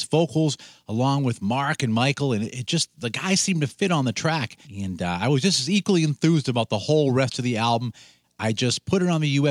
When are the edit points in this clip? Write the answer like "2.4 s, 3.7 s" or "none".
4.6 s, 8.2 s